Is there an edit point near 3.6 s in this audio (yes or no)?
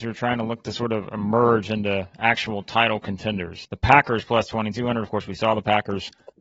yes